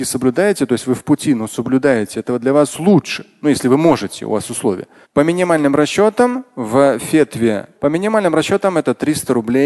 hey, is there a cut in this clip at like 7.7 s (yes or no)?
yes